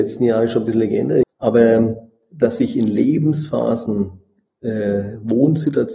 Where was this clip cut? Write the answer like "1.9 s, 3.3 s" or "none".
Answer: 1.2 s

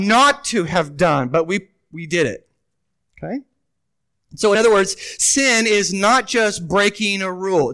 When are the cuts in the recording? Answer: none

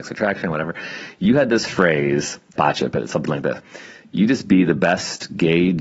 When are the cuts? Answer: 2.6 s

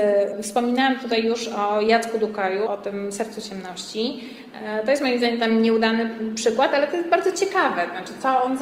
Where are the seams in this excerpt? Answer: 2.7 s

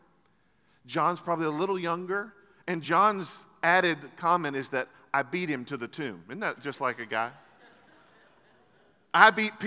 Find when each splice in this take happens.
none

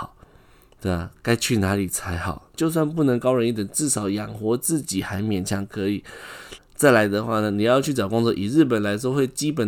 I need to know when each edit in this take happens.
2.5 s, 6.6 s

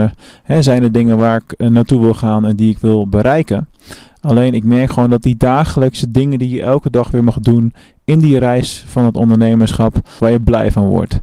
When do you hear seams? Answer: 10.2 s

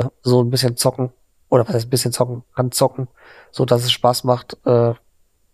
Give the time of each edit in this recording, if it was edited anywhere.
none

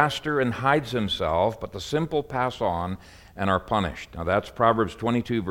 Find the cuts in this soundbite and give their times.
none

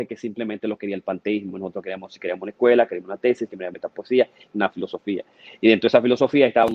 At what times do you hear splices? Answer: 4.5 s

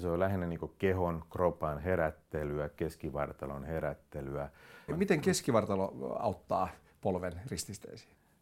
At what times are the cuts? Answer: 4.9 s

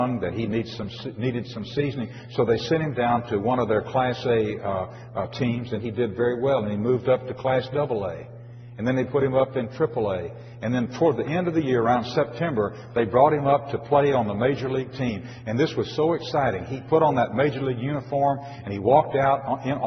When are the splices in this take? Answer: none

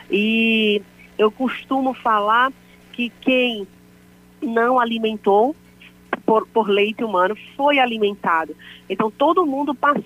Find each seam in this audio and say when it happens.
6.2 s

